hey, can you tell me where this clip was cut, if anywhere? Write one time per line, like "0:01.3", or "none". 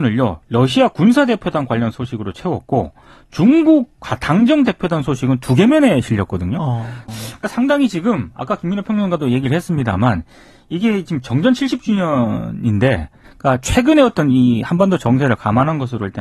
0:07.1
0:13.3